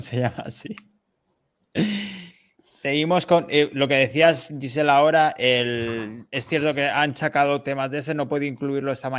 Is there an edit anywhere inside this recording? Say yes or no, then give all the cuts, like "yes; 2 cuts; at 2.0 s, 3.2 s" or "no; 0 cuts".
no; 0 cuts